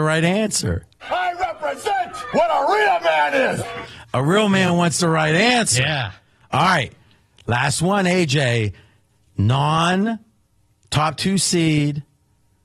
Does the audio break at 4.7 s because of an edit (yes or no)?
no